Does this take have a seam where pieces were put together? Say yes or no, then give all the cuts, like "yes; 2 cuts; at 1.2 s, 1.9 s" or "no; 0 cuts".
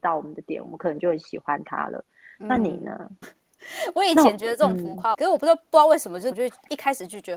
yes; 3 cuts; at 3.2 s, 5.1 s, 6.3 s